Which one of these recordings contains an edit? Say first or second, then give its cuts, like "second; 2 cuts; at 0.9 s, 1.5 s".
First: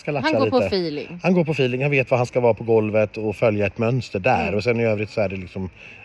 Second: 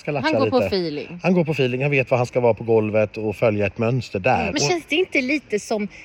second; 1 cut; at 4.5 s